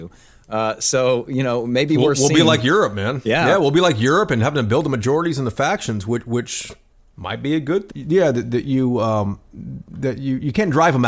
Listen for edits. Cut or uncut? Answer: cut